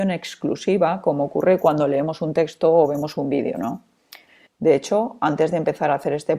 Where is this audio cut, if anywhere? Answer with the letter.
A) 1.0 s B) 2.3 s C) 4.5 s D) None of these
C